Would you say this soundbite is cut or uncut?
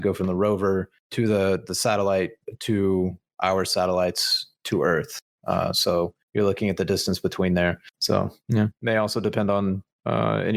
uncut